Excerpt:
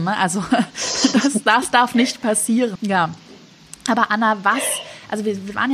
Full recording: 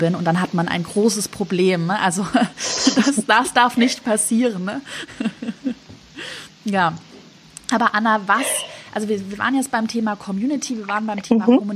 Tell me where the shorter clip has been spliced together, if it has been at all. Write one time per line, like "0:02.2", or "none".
0:02.8

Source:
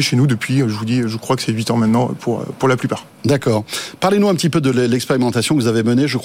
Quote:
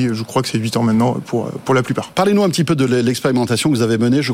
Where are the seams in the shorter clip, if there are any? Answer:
0:02.1

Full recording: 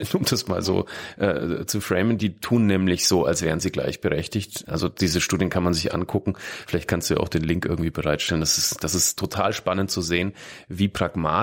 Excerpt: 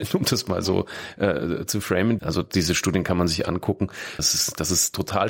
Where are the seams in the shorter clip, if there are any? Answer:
0:02.2
0:04.2

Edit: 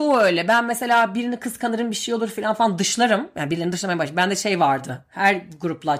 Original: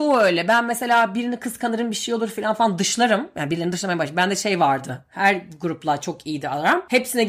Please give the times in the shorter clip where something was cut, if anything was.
none

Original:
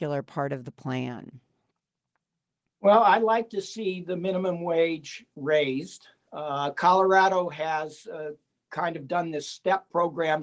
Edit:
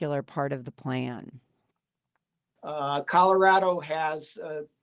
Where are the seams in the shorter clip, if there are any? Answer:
0:02.6

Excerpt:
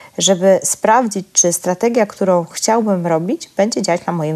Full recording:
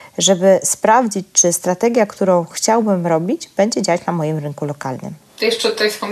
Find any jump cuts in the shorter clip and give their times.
none

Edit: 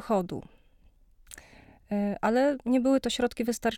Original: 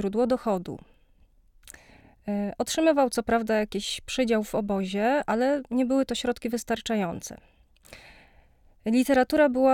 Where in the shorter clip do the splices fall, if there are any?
0:02.2

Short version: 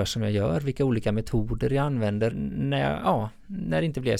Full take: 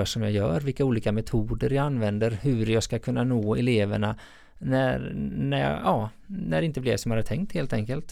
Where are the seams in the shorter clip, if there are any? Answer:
0:02.3

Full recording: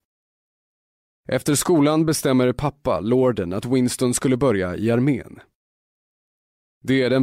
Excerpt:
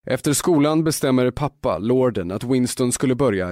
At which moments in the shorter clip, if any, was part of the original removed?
none

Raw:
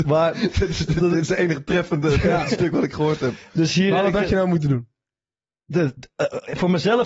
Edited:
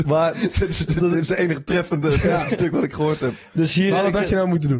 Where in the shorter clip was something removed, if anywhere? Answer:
none

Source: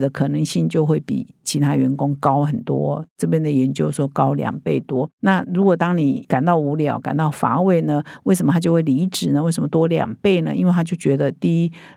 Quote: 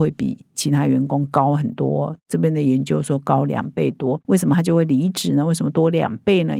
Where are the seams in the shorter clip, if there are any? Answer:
0:04.2

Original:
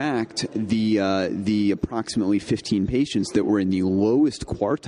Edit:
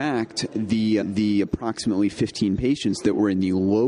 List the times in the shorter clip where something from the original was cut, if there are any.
0:01.0

